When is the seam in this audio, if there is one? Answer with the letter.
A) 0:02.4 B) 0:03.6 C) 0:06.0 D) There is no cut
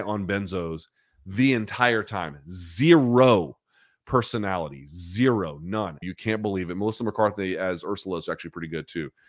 C